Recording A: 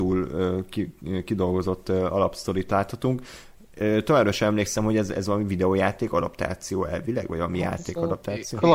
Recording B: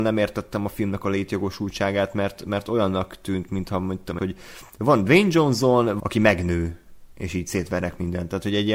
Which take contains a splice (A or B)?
B